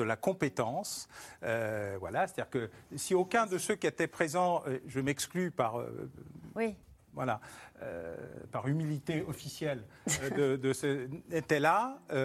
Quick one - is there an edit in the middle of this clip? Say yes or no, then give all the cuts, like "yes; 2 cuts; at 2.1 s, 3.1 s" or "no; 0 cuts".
no; 0 cuts